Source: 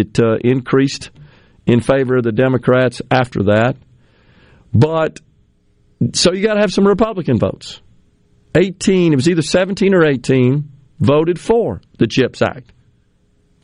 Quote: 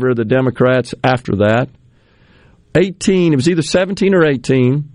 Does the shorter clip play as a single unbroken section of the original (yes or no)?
no